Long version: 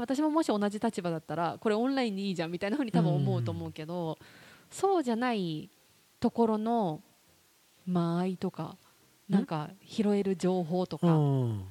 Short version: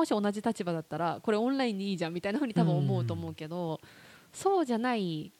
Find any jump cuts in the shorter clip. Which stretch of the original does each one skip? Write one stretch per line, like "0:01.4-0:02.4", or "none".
none